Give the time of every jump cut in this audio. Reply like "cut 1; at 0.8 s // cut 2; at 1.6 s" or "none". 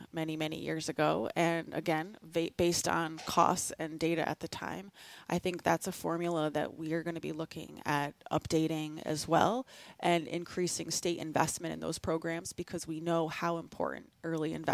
none